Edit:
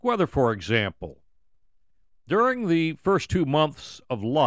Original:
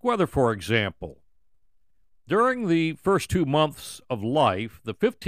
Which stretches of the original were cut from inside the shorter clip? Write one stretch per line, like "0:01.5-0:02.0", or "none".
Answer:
none